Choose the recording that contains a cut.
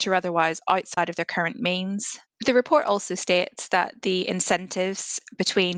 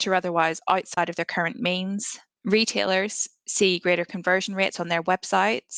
first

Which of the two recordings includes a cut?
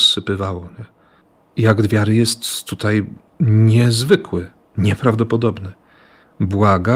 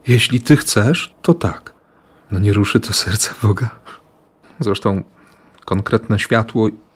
second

